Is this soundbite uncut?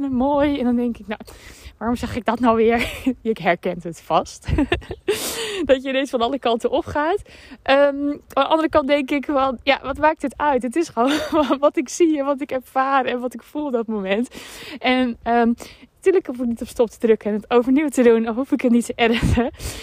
yes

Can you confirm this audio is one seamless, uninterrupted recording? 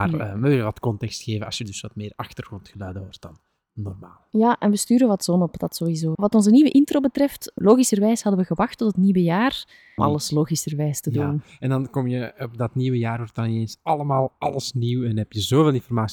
no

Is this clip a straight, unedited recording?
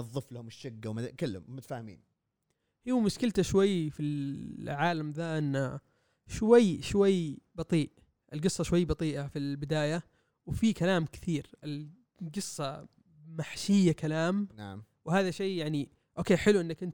yes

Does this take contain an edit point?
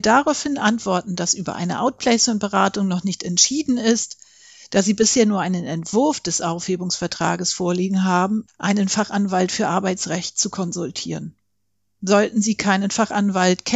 yes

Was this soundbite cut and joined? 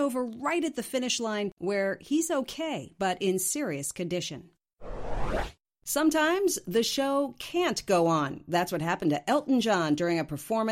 yes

